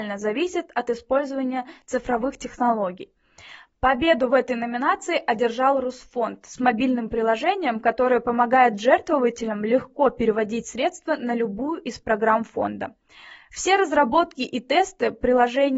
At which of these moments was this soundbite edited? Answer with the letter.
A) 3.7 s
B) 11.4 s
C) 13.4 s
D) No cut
A